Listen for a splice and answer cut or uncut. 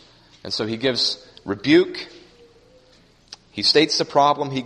uncut